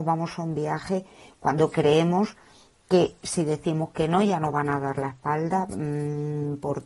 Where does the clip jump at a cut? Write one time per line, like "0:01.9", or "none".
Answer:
none